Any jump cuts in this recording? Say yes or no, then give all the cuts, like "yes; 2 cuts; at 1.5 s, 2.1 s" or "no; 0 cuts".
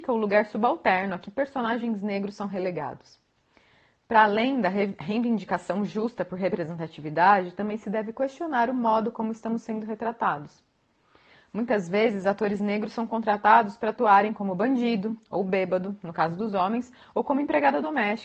no; 0 cuts